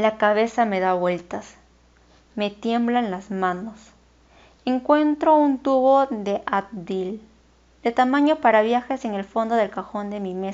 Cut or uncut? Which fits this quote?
uncut